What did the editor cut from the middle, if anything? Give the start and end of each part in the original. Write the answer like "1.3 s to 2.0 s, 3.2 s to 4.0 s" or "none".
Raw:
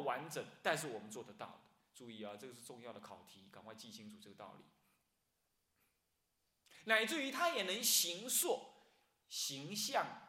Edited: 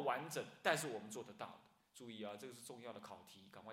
none